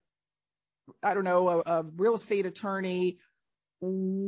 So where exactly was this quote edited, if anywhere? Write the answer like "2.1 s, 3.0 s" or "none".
1.6 s